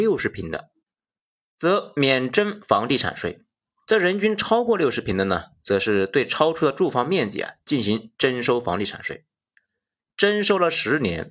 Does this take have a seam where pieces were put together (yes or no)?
no